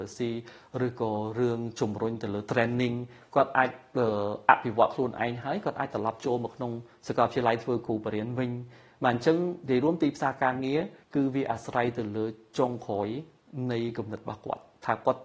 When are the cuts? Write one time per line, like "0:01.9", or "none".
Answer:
0:11.0